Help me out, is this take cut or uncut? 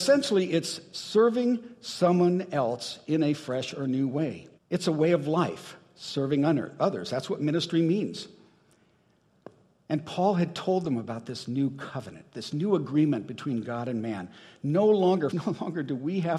cut